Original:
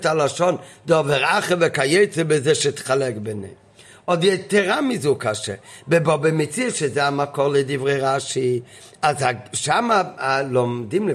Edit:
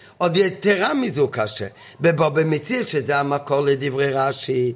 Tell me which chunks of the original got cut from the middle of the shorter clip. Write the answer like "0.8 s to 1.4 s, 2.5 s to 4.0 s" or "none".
none